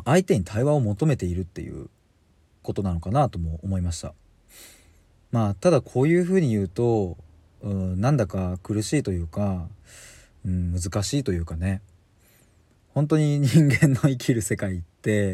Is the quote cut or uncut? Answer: uncut